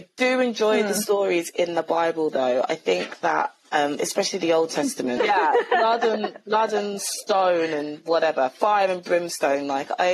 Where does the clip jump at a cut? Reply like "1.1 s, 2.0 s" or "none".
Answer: 5.2 s